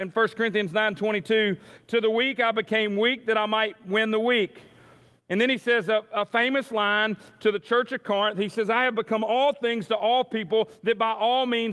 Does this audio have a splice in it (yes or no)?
no